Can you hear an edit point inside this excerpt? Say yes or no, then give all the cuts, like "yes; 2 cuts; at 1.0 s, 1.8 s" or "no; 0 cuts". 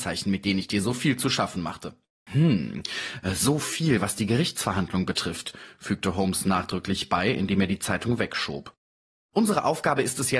yes; 1 cut; at 2.3 s